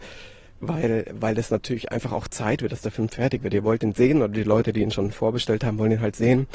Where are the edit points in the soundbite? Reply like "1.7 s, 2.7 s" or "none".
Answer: none